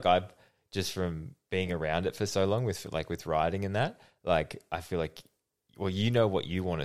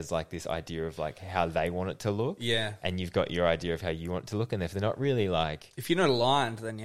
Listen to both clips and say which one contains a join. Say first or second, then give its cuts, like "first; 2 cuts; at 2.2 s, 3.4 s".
first; 1 cut; at 1.4 s